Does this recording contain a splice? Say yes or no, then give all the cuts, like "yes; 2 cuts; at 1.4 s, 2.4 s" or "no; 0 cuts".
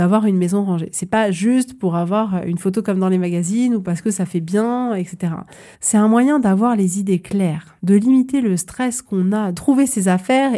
yes; 3 cuts; at 5.7 s, 7.8 s, 9.5 s